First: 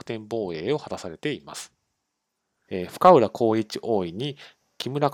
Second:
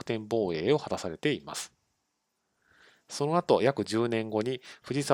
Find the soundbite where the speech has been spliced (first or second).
first